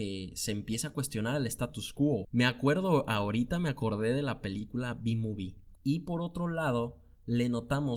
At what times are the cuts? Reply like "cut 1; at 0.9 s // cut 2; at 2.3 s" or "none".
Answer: cut 1; at 2.2 s // cut 2; at 5.8 s